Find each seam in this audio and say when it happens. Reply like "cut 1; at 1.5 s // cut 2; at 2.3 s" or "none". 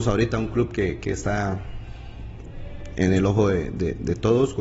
none